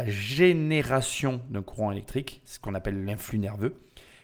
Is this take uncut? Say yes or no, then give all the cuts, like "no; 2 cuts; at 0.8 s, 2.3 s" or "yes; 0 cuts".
yes; 0 cuts